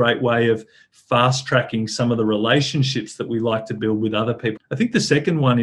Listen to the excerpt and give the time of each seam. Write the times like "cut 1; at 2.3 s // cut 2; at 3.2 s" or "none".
cut 1; at 4.6 s